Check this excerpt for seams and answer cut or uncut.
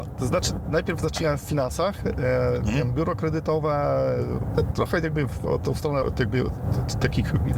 cut